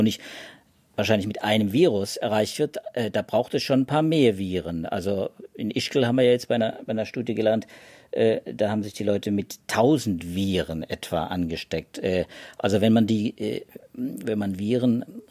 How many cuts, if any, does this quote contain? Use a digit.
0